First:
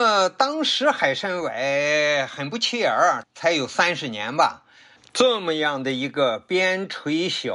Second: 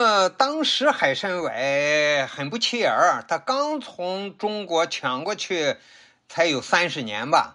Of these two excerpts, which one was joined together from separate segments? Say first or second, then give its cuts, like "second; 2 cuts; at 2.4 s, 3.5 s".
first; 2 cuts; at 3.2 s, 5.0 s